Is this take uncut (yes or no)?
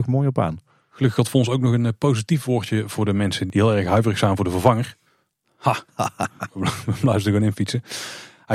yes